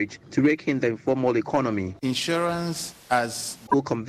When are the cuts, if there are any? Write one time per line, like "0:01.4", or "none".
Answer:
none

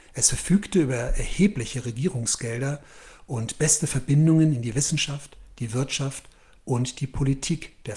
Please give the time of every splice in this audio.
none

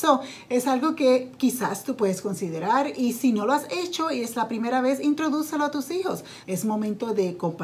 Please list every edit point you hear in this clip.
0:06.4

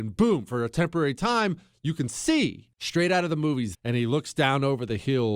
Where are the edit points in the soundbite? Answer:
0:02.7
0:03.7

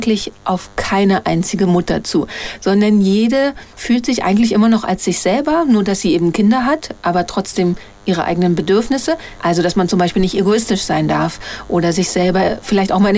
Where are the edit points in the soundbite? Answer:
0:03.7
0:09.4

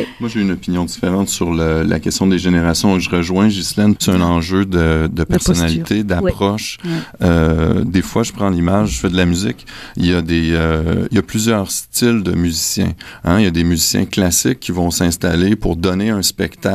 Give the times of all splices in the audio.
0:04.0

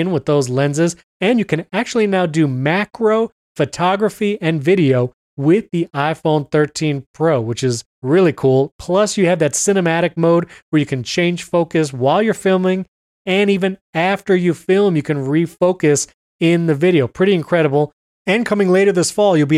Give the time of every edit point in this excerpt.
none

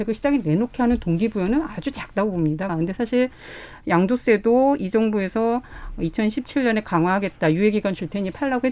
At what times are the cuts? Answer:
0:02.7

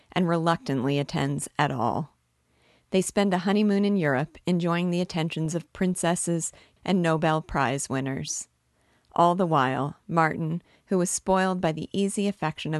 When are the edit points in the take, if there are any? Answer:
0:06.8

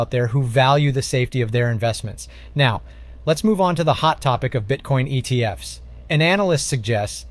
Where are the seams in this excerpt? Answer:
none

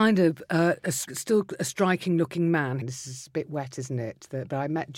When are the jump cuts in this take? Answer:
0:01.1
0:02.8

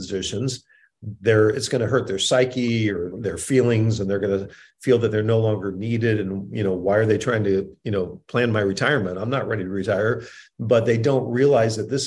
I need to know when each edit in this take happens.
0:03.1

